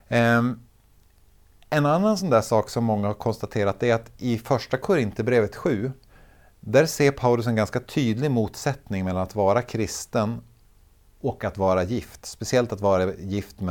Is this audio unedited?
yes; 0 cuts

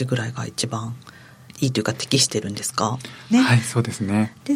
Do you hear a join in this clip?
yes; 1 cut; at 3.3 s

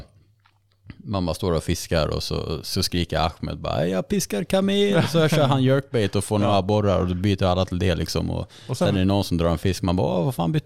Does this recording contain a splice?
no; 0 cuts

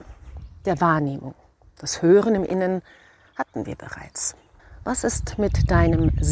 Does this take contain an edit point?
no; 0 cuts

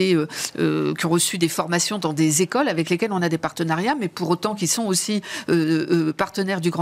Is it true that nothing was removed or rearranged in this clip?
yes; 0 cuts

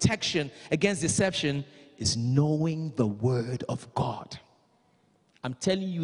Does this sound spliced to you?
no; 0 cuts

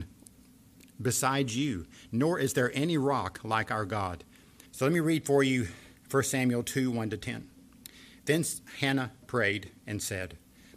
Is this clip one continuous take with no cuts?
no; 1 cut; at 4.6 s

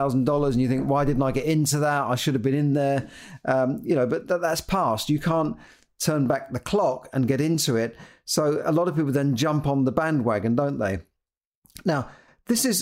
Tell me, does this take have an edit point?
no; 0 cuts

